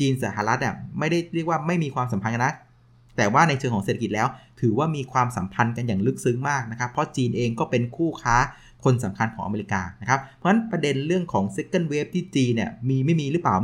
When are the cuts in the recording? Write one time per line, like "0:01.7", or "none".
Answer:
none